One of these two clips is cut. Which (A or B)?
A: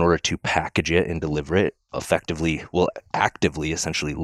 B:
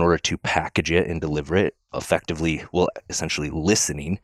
B